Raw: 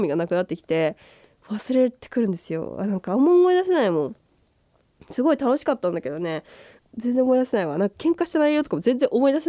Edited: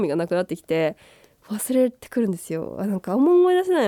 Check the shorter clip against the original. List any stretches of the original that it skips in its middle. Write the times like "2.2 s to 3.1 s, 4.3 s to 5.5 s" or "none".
none